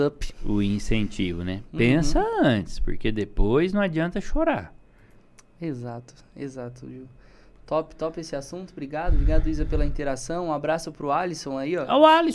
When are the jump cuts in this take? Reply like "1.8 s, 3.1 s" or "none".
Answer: none